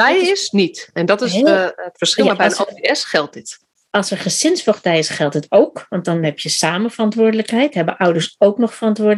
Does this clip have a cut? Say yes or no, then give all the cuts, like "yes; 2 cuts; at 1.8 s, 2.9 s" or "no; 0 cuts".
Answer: no; 0 cuts